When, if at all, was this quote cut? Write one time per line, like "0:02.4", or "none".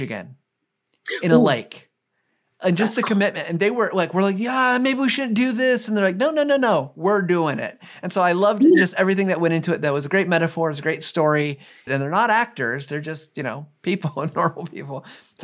0:11.9